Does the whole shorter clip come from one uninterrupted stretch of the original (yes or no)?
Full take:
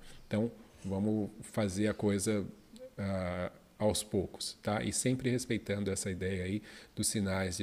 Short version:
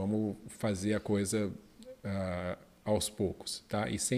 yes